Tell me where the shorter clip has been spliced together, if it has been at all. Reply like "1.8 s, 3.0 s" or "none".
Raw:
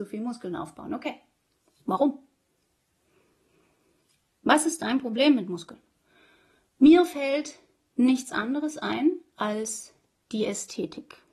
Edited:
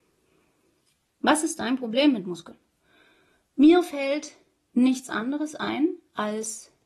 none